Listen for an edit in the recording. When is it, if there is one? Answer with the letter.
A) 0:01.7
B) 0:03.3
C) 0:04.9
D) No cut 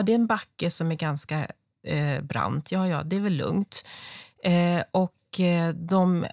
D